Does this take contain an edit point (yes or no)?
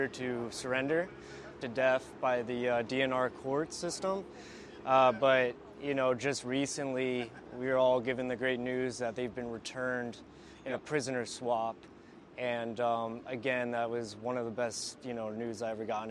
yes